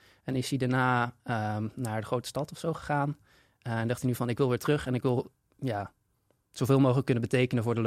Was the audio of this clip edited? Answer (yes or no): no